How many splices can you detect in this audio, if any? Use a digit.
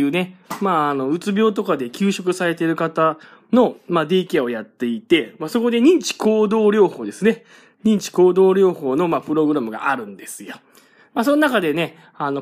0